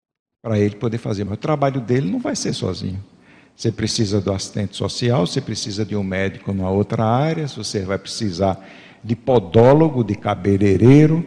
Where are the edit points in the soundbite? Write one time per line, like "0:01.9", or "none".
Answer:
none

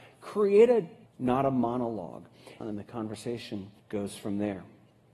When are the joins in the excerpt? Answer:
0:01.1
0:02.6
0:03.8

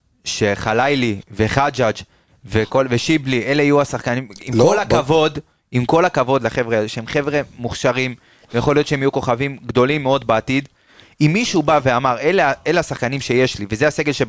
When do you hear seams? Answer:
none

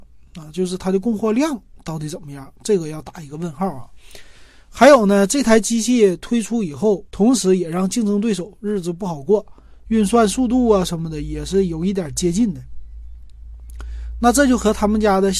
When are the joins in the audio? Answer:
0:07.1
0:09.9

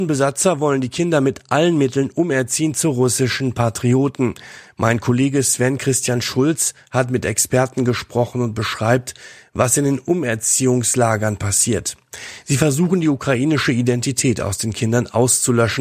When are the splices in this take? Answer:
none

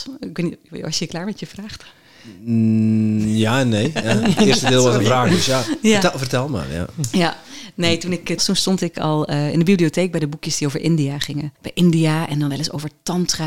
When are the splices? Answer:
0:08.4
0:11.6

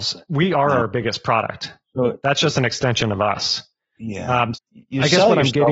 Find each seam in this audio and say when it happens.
0:04.5

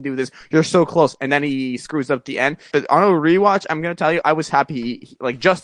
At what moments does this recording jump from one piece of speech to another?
0:02.7
0:04.2

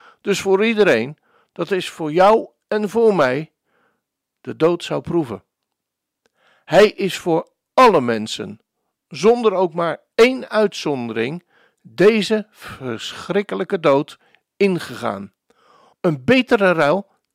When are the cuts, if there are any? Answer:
0:15.9

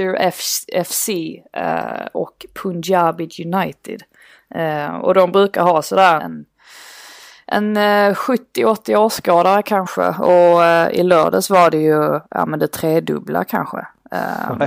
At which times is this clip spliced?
0:06.2

